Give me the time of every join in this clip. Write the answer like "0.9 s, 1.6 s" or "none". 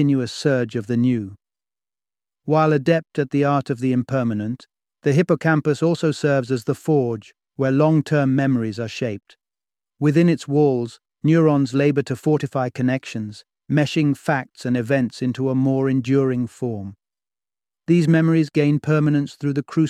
none